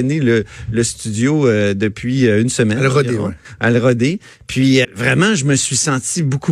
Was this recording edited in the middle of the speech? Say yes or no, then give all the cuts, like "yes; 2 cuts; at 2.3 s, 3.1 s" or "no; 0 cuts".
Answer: yes; 1 cut; at 4.8 s